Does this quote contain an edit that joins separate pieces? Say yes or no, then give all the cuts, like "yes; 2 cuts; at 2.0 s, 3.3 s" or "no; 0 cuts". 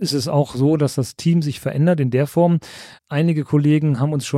yes; 1 cut; at 3.0 s